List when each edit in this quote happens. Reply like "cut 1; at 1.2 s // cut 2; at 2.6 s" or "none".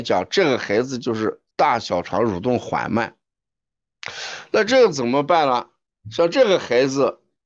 cut 1; at 1.5 s